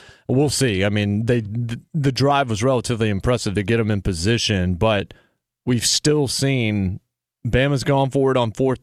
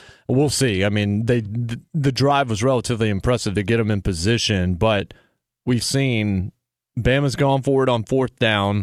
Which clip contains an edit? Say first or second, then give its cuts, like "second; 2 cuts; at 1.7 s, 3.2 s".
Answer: second; 1 cut; at 5.8 s